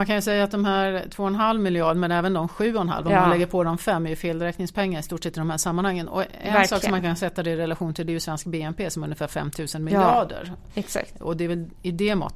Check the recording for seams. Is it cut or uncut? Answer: uncut